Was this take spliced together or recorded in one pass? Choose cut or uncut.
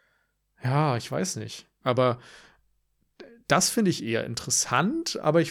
cut